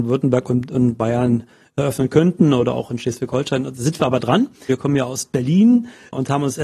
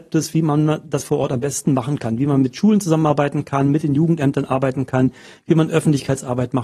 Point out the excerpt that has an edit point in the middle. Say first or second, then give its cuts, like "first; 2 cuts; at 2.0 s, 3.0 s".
first; 1 cut; at 4.7 s